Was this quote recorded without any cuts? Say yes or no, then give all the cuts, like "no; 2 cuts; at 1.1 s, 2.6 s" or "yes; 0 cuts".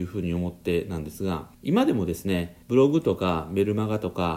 no; 2 cuts; at 1.5 s, 2.6 s